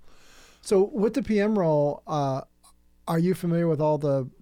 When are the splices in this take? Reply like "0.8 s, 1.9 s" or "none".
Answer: none